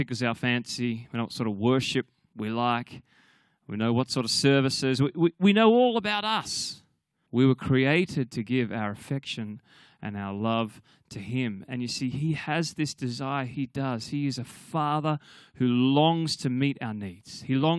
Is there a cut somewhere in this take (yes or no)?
yes